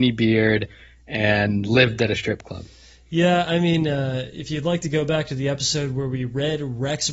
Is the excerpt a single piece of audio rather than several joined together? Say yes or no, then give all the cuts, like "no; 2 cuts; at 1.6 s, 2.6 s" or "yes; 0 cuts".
yes; 0 cuts